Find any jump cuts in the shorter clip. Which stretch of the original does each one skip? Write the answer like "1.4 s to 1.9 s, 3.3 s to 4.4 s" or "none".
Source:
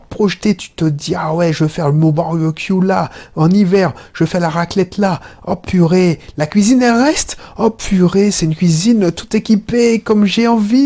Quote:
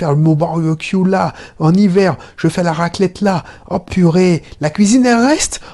none